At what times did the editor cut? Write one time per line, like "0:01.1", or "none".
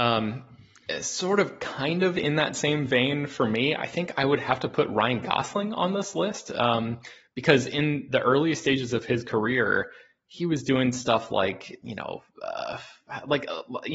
none

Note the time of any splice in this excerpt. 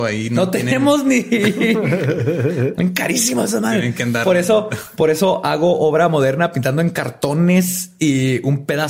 none

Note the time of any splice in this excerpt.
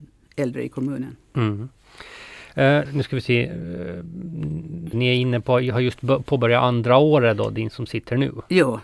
0:02.9
0:04.9

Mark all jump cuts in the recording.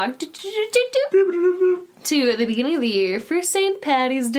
none

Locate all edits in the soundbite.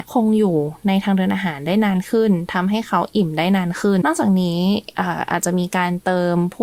0:04.0

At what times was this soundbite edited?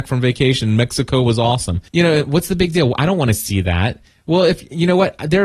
0:01.9

